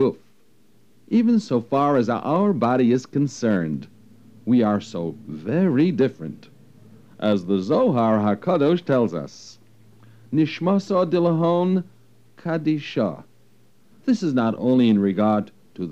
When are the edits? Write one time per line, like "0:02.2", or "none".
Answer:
0:13.9